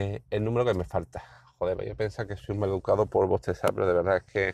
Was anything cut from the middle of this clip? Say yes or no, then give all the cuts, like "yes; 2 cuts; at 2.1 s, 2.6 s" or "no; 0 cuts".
no; 0 cuts